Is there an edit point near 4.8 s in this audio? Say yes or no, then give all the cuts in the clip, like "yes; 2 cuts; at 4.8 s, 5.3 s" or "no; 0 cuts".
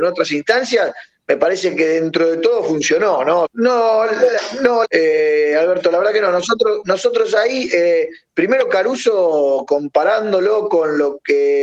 yes; 2 cuts; at 3.4 s, 4.8 s